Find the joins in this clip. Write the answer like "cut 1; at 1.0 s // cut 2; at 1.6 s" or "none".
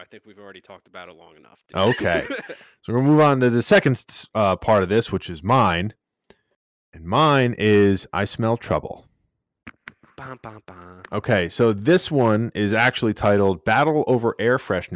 none